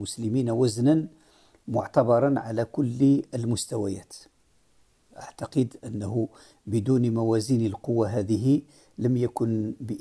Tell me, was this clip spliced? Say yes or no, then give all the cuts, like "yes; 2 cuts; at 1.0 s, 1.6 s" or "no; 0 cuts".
no; 0 cuts